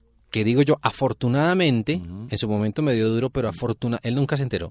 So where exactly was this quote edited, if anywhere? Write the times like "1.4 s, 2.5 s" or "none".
none